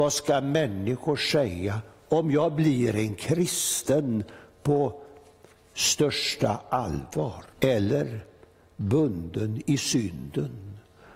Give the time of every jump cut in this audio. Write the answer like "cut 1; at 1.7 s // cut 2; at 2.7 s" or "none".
cut 1; at 7.5 s